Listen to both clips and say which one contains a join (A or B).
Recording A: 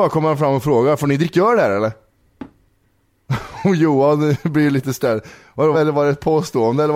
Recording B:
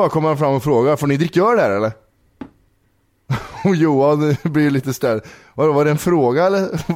A